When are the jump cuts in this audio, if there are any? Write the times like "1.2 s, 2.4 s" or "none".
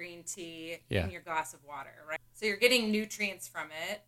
2.2 s